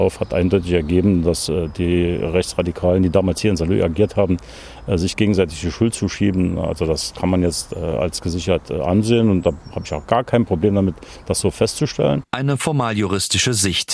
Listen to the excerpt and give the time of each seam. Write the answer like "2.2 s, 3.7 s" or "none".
none